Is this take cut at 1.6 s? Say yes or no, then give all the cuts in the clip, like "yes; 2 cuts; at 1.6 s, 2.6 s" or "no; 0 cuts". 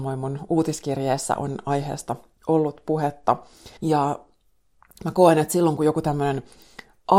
no; 1 cut; at 3.8 s